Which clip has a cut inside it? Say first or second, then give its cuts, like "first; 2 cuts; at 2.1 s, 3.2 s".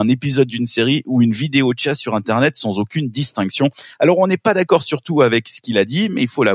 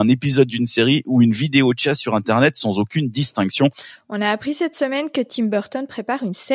second; 1 cut; at 3.9 s